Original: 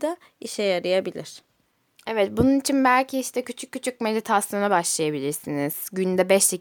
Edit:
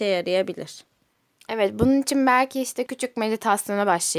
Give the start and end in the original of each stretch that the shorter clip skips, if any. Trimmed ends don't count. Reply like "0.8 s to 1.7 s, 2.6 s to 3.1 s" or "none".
3.4 s to 3.7 s